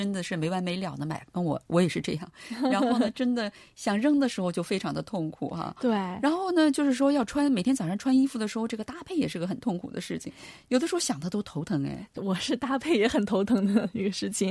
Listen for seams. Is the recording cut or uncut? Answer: uncut